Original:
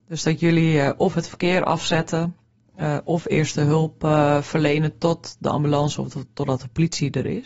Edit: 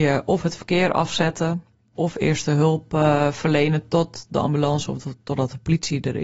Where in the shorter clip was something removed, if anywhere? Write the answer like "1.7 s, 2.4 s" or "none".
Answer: 1.9 s